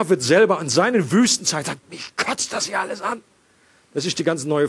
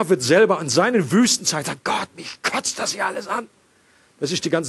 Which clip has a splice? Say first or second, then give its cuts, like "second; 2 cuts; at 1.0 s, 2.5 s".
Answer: first; 1 cut; at 1.8 s